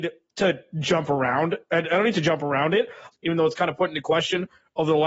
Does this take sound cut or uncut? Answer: cut